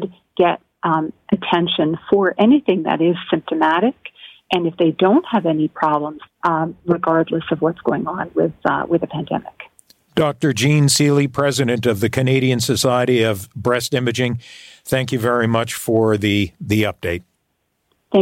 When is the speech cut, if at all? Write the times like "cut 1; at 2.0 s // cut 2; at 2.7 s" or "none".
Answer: cut 1; at 6.3 s